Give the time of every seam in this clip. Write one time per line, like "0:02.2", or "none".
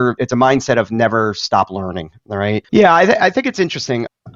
0:02.7